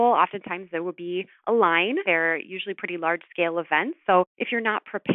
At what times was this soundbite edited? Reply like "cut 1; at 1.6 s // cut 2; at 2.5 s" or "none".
cut 1; at 2.0 s